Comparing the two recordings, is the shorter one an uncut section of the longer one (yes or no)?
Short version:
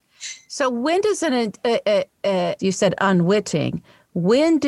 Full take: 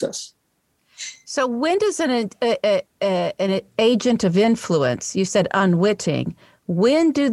no